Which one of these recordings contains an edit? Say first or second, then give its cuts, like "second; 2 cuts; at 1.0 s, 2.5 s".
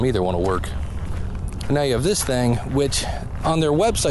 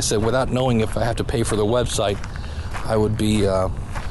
first; 1 cut; at 1.6 s